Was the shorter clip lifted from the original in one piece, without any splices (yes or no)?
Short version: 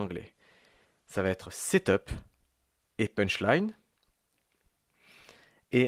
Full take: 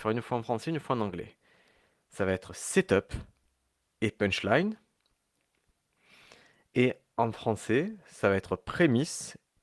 yes